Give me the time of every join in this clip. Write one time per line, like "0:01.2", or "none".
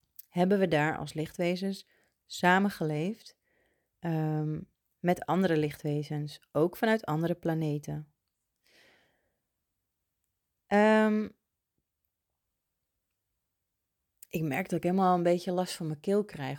none

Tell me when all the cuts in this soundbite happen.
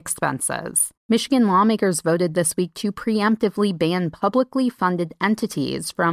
0:01.0

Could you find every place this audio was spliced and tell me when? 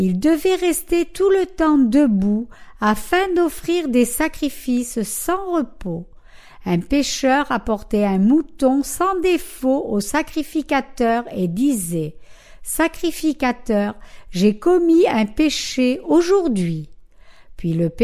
none

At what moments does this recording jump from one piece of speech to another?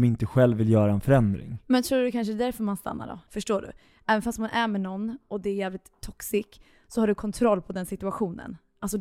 0:03.3

